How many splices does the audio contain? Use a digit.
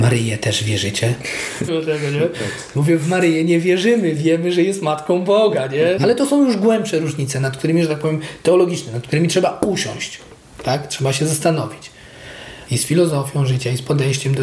3